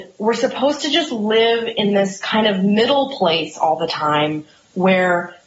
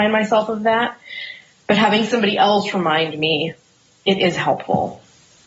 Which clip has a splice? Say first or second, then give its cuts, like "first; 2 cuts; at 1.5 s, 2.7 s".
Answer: second; 1 cut; at 3.9 s